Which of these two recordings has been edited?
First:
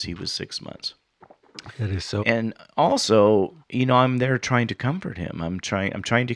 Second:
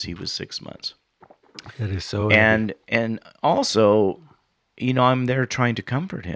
first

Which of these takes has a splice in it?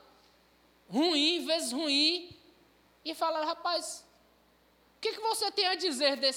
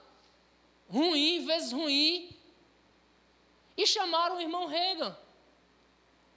first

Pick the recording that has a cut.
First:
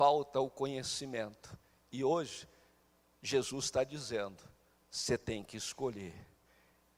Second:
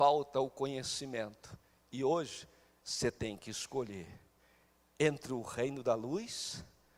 second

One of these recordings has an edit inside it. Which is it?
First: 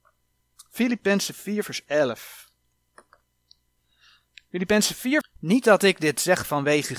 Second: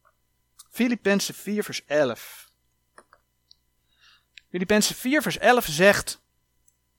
first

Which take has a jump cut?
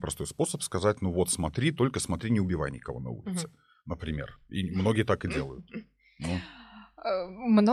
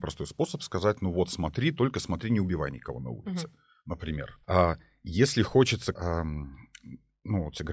second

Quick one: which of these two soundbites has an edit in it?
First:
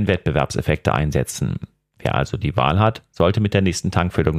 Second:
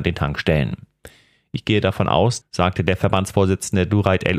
second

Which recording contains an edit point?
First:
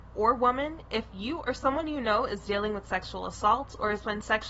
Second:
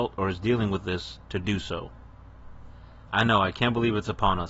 second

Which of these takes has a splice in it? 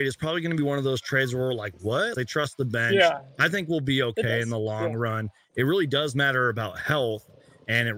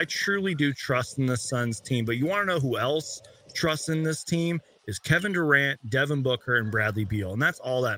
first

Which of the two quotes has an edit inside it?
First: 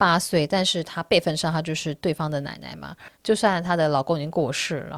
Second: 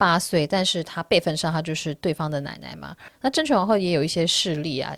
first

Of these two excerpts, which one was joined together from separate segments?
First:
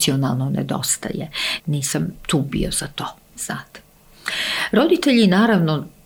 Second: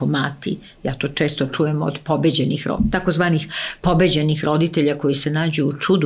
first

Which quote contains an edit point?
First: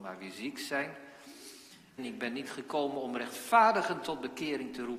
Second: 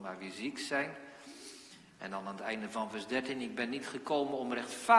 first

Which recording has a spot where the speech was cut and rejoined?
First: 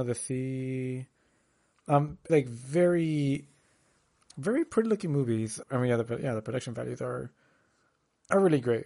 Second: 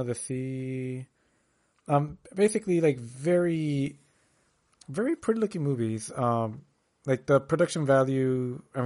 first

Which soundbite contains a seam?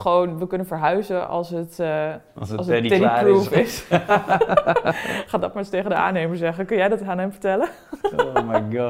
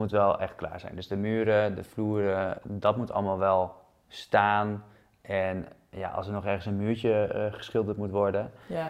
second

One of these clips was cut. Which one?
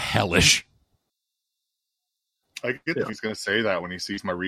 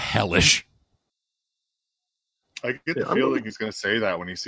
first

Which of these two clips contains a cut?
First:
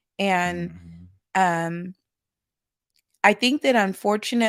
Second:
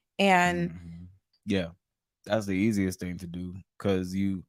second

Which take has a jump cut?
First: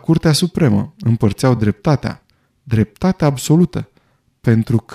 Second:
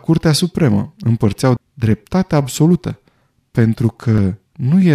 second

